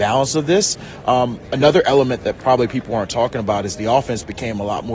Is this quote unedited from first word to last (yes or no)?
yes